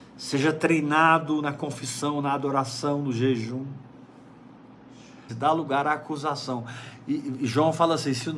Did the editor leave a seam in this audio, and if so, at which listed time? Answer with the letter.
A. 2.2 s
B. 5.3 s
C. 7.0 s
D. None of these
B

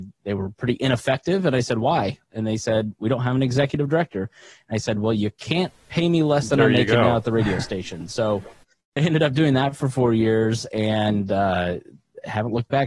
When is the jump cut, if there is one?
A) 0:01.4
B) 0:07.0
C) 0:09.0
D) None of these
C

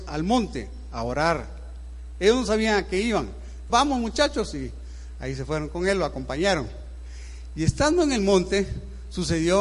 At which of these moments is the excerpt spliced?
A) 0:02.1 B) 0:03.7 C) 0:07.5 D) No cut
B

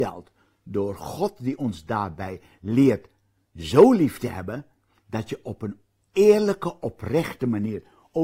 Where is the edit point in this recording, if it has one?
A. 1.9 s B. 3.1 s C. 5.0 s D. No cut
C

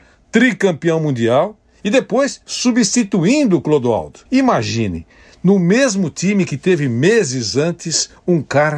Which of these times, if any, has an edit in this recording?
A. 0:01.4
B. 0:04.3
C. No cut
B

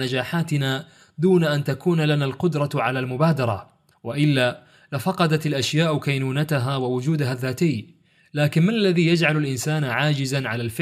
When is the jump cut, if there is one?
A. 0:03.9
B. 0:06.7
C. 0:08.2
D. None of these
A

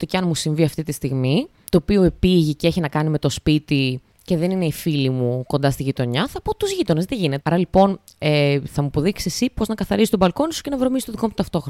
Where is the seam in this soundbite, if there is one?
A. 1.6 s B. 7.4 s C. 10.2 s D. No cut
B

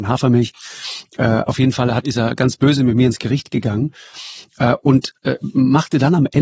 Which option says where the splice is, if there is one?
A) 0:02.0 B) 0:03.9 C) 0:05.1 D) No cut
A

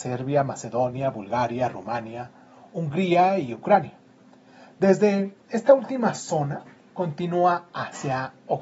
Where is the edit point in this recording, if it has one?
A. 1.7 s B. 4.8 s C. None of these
C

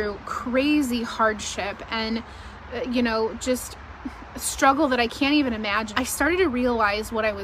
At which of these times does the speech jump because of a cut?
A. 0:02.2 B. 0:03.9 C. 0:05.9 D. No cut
C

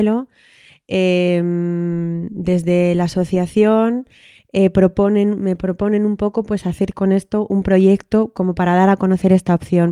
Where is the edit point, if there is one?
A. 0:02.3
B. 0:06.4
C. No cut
C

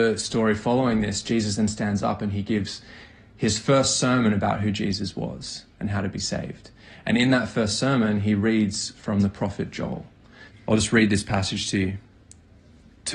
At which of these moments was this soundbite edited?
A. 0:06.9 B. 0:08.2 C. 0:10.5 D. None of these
C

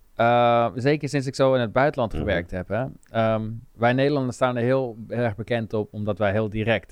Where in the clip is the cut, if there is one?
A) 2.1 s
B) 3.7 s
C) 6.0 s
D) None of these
B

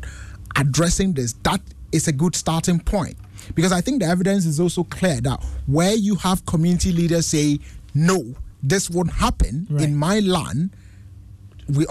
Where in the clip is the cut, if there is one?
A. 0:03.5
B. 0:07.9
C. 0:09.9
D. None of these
D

